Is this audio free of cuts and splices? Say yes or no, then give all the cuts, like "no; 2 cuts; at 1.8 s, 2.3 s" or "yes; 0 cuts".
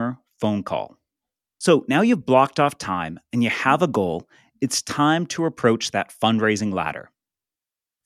yes; 0 cuts